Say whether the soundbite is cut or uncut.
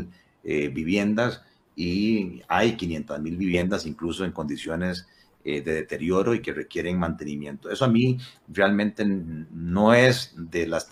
uncut